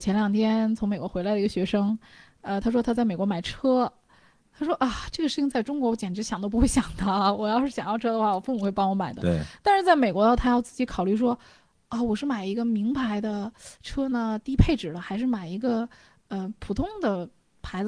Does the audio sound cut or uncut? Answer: uncut